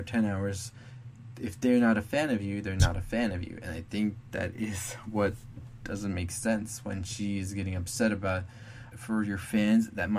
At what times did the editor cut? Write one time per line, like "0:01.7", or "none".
0:08.9